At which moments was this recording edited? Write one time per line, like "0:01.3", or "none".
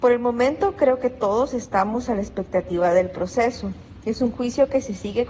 none